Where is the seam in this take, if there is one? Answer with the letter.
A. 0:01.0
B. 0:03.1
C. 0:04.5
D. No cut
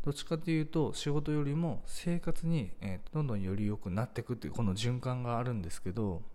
B